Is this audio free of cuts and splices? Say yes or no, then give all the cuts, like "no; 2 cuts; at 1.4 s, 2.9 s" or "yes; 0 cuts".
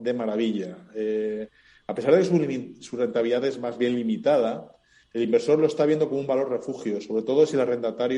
yes; 0 cuts